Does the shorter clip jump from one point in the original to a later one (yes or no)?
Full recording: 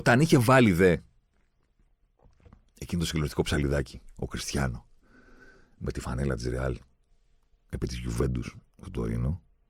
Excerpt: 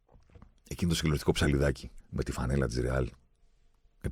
yes